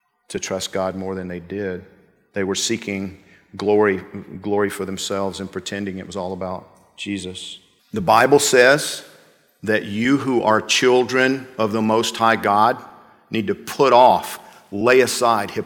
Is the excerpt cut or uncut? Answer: cut